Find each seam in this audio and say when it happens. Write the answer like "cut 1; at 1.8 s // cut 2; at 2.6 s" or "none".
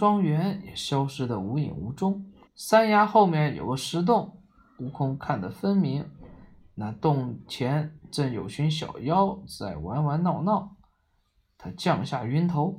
cut 1; at 2.5 s